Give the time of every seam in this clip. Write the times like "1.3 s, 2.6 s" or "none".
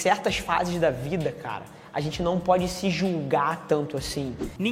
none